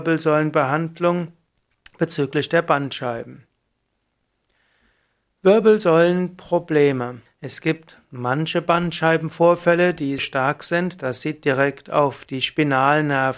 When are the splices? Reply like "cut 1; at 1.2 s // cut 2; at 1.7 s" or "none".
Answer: cut 1; at 7.3 s // cut 2; at 10.2 s